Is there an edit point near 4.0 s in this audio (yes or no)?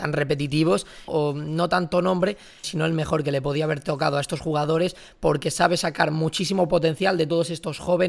no